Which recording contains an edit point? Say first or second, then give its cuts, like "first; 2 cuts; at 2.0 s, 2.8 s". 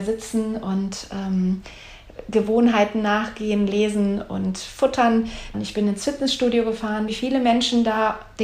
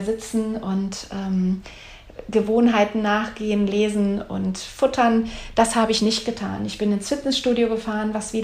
first; 2 cuts; at 5.5 s, 7.1 s